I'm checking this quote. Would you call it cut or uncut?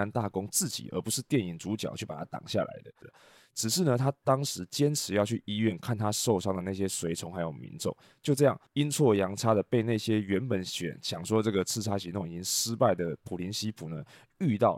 cut